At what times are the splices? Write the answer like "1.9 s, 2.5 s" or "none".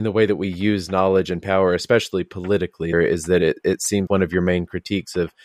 2.9 s, 4.1 s